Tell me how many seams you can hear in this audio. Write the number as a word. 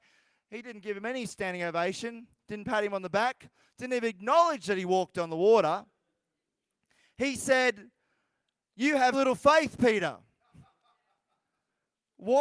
one